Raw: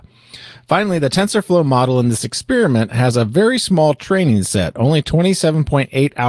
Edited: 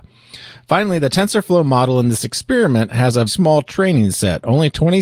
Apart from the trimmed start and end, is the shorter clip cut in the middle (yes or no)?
yes